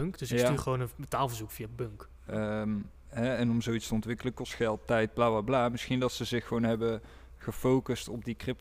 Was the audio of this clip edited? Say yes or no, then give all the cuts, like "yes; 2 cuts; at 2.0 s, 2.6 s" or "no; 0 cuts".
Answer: yes; 1 cut; at 2.3 s